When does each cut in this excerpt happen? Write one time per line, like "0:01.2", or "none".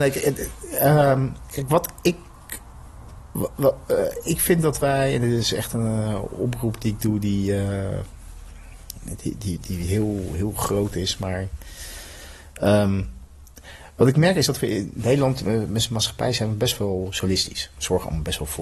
none